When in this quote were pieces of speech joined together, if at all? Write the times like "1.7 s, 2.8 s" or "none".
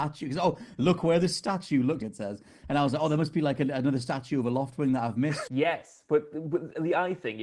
2.0 s, 5.5 s